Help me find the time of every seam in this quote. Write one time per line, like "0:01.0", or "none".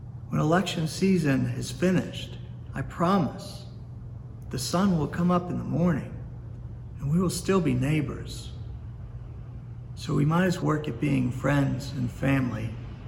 0:10.6